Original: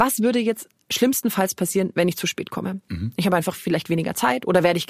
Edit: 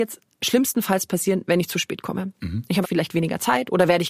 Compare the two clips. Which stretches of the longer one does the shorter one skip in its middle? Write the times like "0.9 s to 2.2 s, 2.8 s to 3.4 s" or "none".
3.3 s to 3.6 s